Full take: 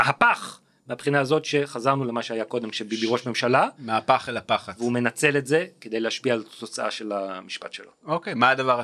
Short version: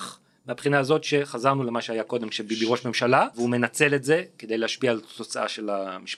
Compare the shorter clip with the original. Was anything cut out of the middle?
yes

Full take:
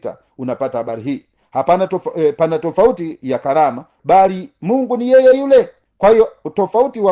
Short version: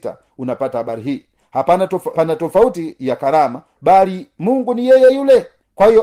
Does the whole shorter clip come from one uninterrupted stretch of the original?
no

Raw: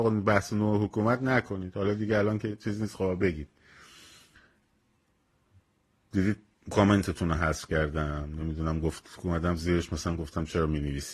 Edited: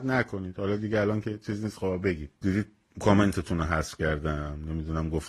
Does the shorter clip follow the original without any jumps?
no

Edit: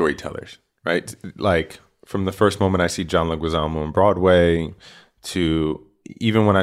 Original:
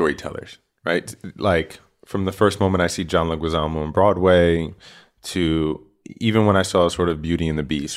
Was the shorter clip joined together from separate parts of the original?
no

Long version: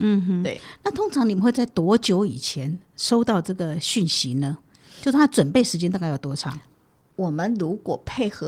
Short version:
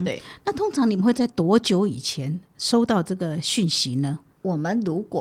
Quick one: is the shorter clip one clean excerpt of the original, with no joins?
no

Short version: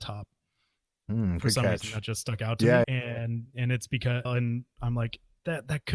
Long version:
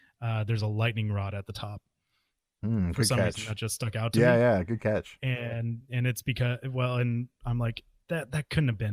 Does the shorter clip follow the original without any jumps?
no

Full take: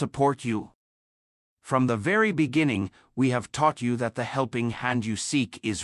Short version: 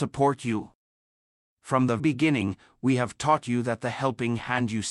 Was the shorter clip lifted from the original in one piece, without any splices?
no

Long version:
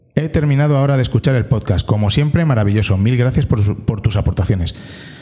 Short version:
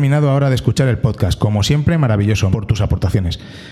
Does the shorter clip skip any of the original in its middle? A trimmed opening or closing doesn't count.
yes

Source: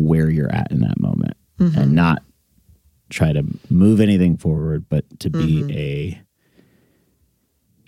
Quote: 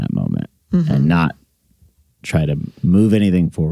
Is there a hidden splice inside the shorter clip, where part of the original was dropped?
no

